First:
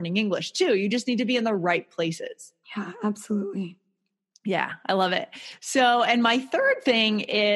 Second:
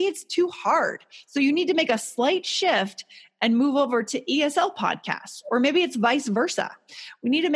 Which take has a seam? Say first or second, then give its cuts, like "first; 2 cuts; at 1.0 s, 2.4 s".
first; 1 cut; at 2.6 s